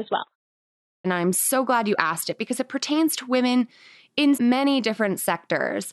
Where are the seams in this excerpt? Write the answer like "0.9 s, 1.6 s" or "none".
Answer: 1.0 s, 4.4 s